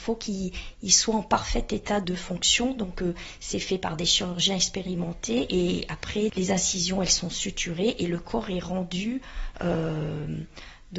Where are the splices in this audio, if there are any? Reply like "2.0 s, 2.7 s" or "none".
2.0 s, 6.3 s